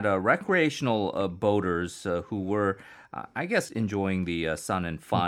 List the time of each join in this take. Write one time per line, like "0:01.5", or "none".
0:03.7